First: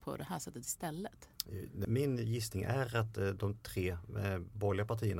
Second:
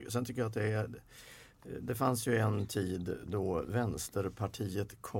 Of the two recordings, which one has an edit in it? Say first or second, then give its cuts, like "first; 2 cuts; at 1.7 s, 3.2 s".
first; 1 cut; at 1.8 s